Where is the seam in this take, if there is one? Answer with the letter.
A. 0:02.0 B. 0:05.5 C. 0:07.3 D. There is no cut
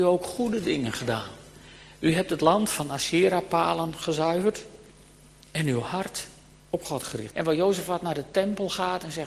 C